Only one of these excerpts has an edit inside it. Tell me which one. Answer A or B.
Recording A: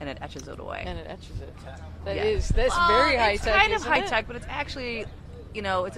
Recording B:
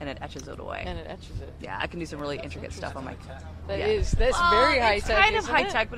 A